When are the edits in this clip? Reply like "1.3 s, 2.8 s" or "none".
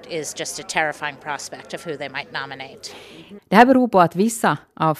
3.4 s